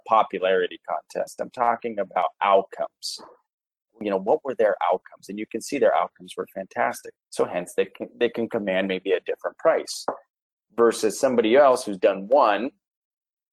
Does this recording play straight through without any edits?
no; 1 cut; at 7.2 s

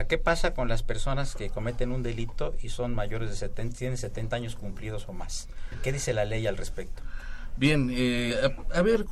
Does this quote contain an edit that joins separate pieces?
no; 0 cuts

